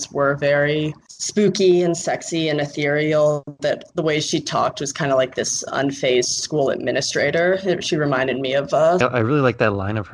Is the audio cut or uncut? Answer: cut